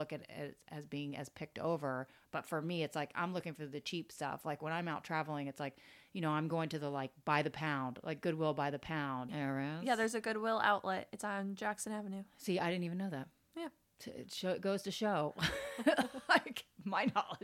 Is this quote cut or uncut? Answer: cut